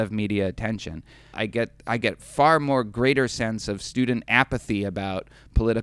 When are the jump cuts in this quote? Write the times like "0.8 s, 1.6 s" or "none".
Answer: 1.3 s